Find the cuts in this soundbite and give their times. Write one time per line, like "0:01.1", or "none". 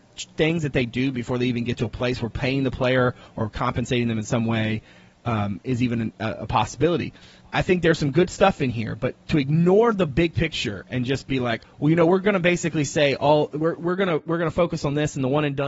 0:11.6